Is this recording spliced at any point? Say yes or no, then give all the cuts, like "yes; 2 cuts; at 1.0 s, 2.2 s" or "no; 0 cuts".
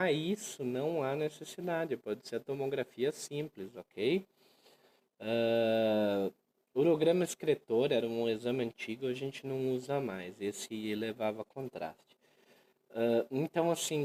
no; 0 cuts